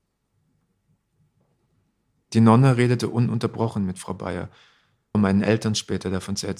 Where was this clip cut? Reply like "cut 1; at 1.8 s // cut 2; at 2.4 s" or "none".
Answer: cut 1; at 5.1 s